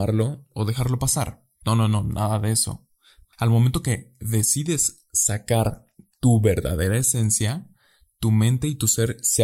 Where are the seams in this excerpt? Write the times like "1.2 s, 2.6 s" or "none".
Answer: 1.6 s, 3.2 s